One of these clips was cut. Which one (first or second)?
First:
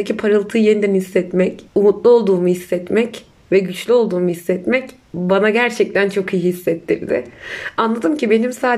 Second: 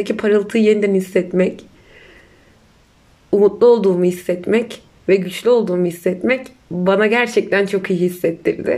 first